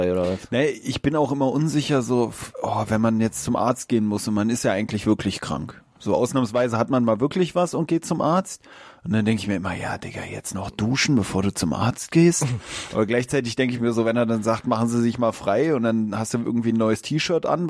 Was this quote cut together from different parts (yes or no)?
no